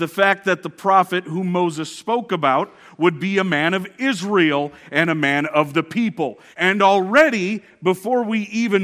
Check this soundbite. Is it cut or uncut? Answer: cut